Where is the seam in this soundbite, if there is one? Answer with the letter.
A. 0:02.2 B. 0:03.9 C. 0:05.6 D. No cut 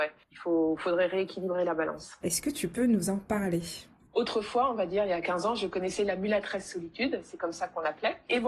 A